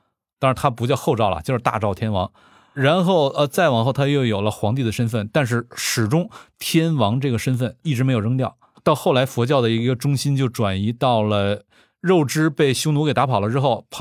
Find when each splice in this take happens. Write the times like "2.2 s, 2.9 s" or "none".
8.7 s